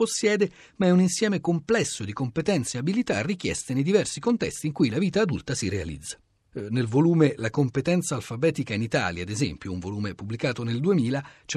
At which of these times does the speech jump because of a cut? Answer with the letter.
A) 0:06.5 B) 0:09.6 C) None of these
A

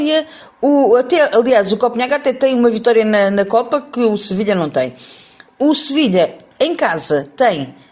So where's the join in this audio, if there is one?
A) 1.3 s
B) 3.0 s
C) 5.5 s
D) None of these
C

